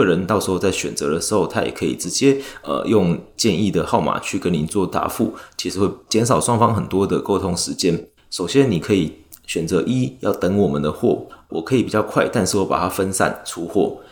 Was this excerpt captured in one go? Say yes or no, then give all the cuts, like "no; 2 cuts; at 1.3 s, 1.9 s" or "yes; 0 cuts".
no; 2 cuts; at 8.2 s, 11.5 s